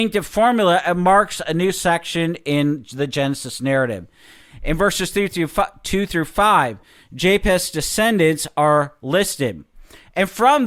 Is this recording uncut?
yes; 0 cuts

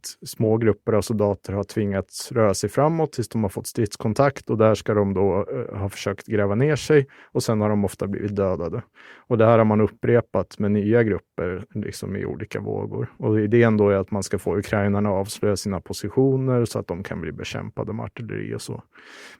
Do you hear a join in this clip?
no; 0 cuts

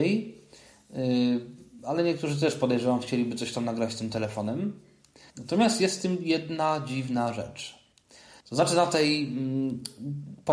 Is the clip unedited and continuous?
no; 2 cuts; at 5.3 s, 8.4 s

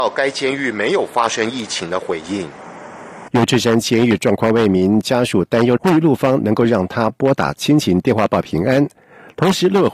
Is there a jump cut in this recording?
yes; 2 cuts; at 3.3 s, 5.8 s

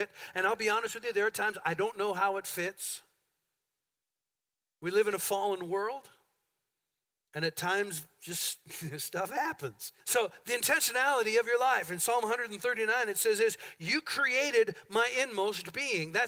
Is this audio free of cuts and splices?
no; 1 cut; at 10.0 s

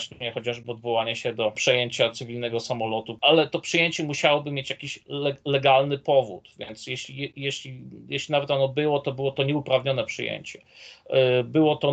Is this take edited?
no; 0 cuts

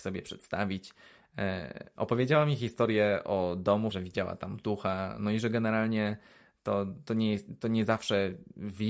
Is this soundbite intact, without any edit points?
no; 2 cuts; at 2.0 s, 3.9 s

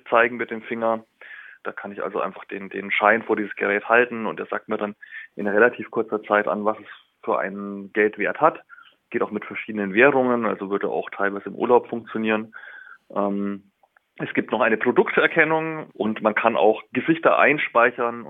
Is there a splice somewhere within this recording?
yes; 2 cuts; at 1.6 s, 15.9 s

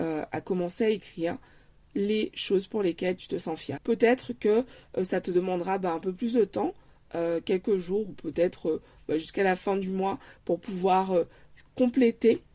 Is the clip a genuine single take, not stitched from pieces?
no; 1 cut; at 3.8 s

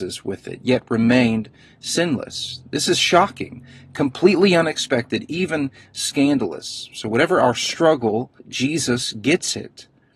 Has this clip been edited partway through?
yes; 1 cut; at 8.4 s

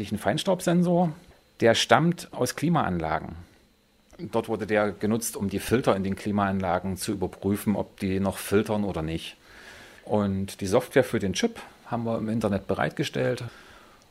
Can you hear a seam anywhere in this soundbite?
yes; 1 cut; at 10.0 s

